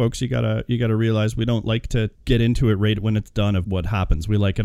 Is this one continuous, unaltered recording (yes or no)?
no